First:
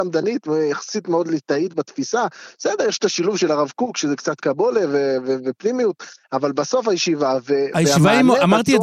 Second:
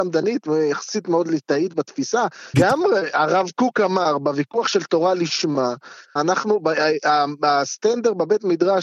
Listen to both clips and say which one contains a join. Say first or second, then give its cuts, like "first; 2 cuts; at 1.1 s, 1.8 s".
second; 2 cuts; at 2.5 s, 6.2 s